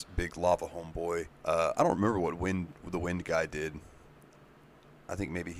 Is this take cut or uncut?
cut